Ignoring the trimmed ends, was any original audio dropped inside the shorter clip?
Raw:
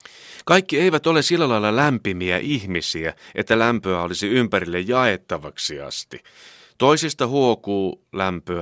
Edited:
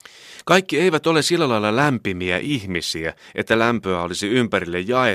no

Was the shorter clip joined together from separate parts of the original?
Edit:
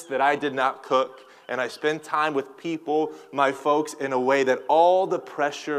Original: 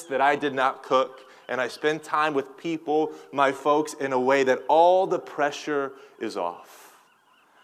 no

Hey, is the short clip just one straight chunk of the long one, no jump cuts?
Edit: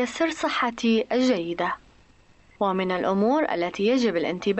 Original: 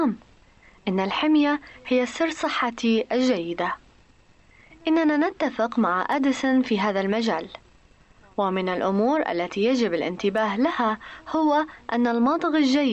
no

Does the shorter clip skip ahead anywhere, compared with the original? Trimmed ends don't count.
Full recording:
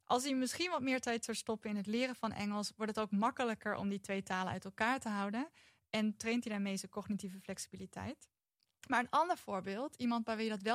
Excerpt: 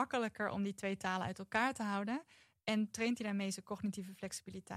no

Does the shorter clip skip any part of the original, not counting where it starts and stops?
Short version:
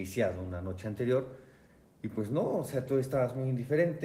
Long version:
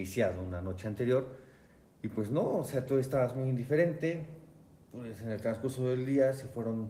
no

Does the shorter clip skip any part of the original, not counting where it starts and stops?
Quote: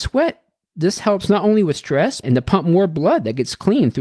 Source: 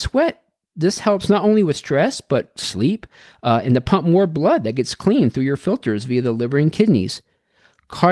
yes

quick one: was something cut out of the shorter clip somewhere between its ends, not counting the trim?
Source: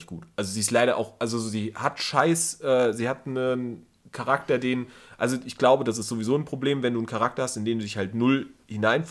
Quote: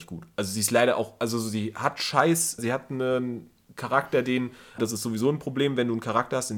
yes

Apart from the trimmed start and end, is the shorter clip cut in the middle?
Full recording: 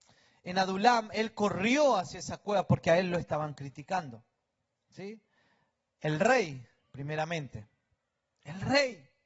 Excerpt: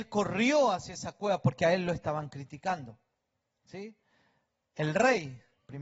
no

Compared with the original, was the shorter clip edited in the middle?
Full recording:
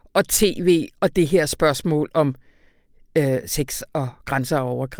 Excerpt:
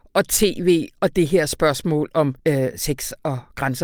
yes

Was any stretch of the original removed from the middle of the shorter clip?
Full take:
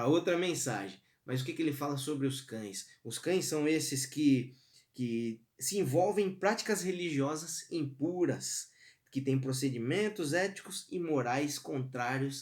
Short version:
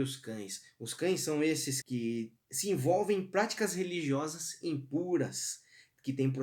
yes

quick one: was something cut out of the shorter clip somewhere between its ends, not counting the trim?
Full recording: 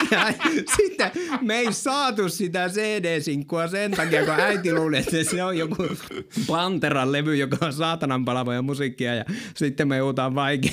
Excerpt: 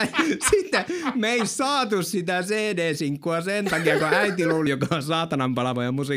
yes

